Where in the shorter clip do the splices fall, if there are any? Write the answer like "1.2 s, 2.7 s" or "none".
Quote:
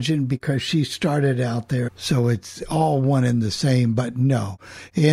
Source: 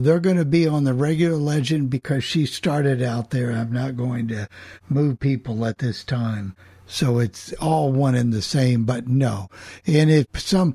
1.9 s